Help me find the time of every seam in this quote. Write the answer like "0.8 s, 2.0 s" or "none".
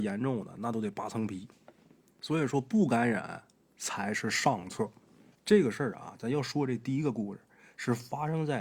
5.3 s